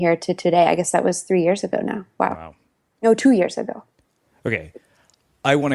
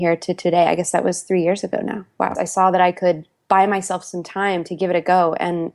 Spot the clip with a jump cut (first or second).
second